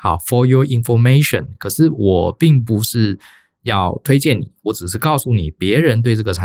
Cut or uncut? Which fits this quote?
uncut